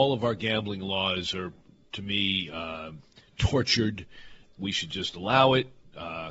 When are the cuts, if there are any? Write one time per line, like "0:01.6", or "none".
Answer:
none